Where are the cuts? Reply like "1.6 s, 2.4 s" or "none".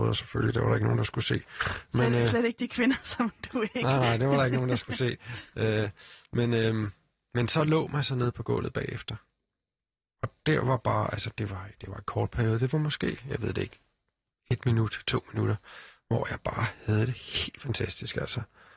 none